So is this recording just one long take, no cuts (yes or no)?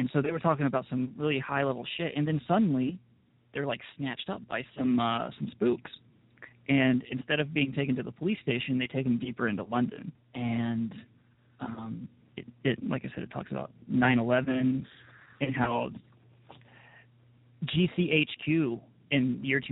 no